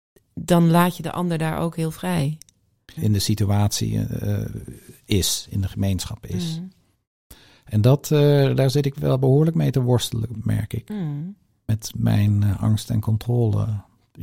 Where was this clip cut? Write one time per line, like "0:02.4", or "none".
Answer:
0:03.0

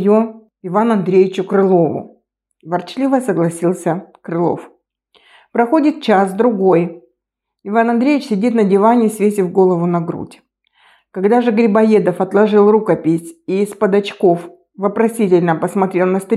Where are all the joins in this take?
0:02.5

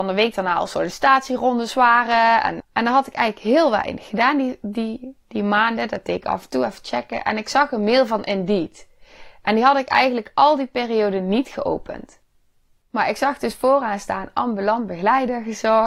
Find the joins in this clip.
0:02.6

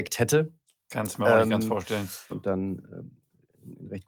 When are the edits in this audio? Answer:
0:02.3

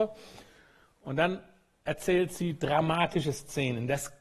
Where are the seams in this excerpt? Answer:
none

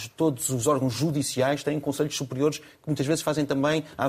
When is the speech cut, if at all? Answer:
none

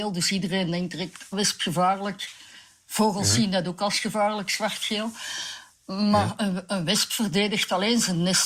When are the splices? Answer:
0:01.3

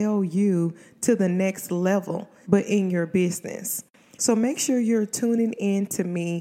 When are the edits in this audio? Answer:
0:02.4
0:04.1

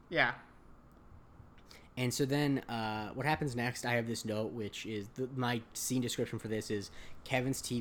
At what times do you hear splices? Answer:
none

